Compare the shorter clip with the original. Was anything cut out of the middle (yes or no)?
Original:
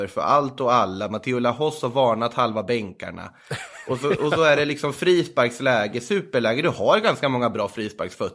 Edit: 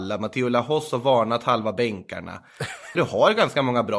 yes